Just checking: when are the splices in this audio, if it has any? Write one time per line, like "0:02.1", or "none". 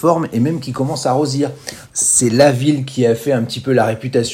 0:01.9